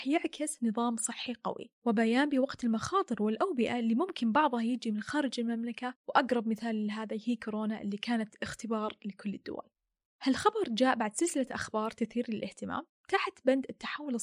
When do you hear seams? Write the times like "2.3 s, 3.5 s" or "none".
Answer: 10.1 s